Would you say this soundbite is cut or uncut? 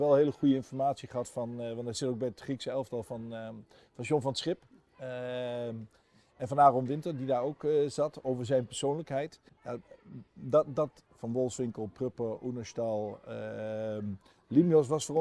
cut